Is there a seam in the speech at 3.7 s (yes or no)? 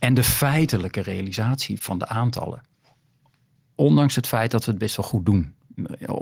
no